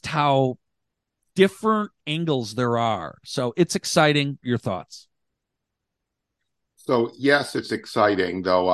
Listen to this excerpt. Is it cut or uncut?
cut